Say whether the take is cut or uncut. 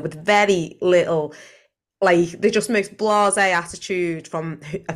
uncut